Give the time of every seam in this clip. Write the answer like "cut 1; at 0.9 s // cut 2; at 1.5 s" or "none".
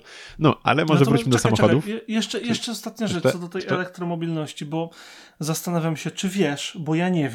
none